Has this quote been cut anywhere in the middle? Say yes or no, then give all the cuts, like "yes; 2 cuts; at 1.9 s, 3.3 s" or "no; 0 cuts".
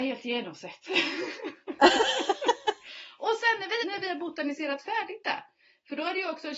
yes; 1 cut; at 3.8 s